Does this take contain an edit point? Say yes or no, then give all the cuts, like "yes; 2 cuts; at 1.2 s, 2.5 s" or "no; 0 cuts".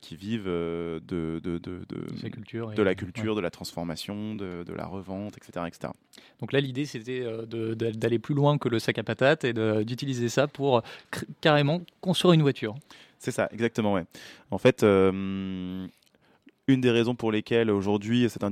no; 0 cuts